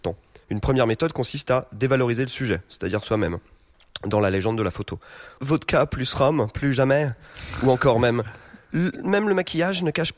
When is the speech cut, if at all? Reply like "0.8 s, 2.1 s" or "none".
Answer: 5.4 s